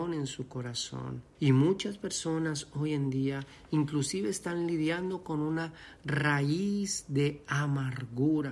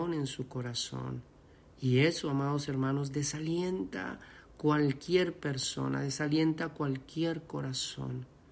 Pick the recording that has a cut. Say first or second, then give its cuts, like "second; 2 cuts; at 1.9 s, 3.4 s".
first; 1 cut; at 1.3 s